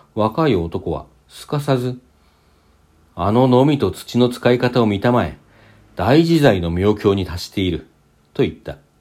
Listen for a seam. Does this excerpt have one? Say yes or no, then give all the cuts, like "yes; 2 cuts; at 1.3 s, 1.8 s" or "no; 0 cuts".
no; 0 cuts